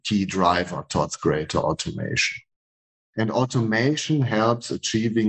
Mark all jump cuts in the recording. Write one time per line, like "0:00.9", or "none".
0:03.0